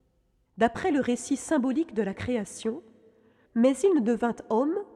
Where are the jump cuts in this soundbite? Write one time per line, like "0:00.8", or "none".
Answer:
0:03.5